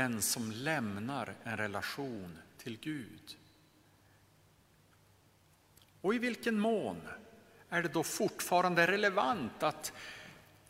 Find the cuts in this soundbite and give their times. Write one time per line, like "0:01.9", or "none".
none